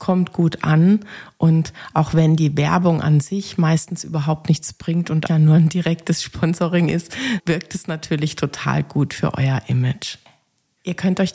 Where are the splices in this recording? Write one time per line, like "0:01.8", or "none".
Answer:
0:05.3
0:07.4

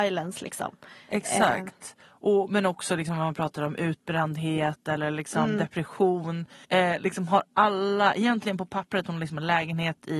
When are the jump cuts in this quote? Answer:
0:06.6

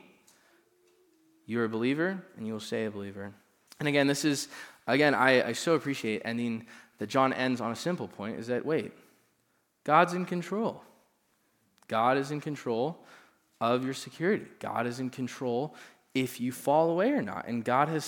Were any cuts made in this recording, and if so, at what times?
0:03.7

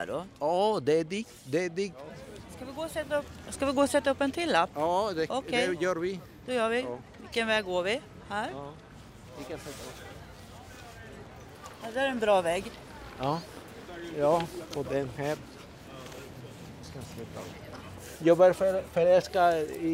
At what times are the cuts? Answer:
none

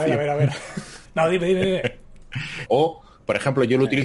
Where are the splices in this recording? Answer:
0:01.1
0:02.7

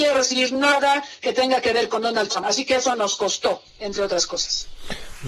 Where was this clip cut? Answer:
none

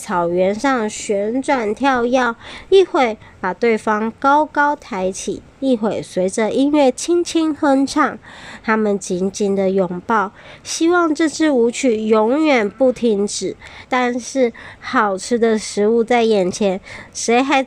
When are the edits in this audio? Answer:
0:13.8

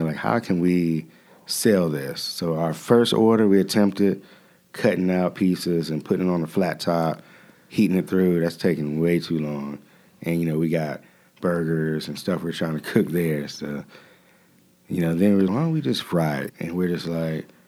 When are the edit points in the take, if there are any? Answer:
0:15.5
0:16.5

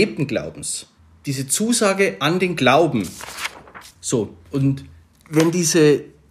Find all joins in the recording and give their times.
0:03.9

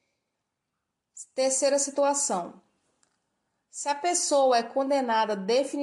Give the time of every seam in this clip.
none

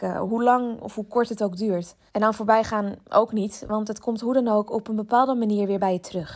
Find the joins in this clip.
0:02.1

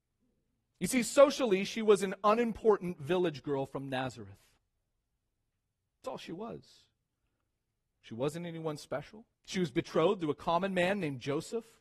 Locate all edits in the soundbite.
0:09.3

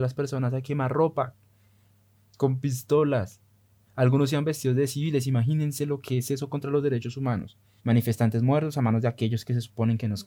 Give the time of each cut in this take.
0:03.9
0:07.8

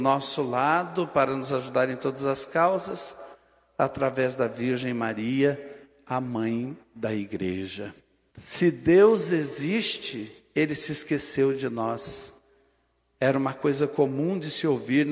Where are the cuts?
0:08.3

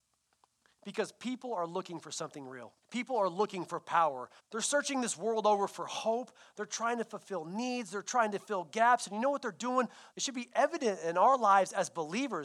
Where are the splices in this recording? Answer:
0:02.8
0:04.4
0:10.1

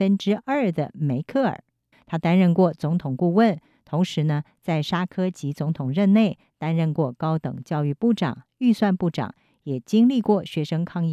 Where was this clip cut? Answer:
0:01.9

